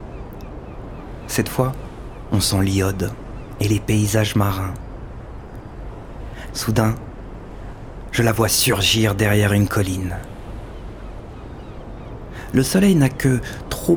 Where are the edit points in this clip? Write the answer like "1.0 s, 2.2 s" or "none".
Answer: 6.5 s

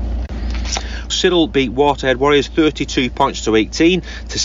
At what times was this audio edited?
1.1 s

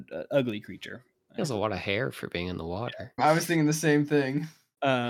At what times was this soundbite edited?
1.4 s, 3.2 s

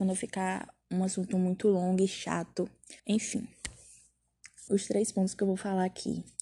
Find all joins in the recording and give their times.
3.0 s, 4.7 s

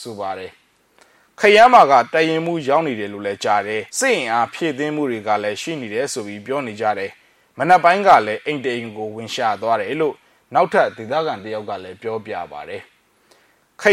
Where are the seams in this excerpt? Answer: 3.9 s

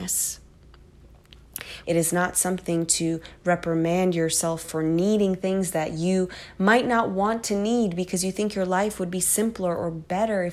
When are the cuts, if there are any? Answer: 1.8 s, 4.6 s

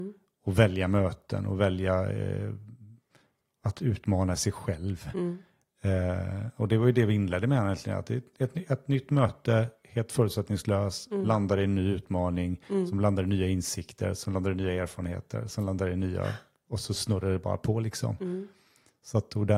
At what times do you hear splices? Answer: none

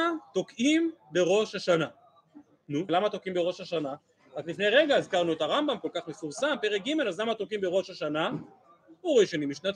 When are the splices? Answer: 2.9 s

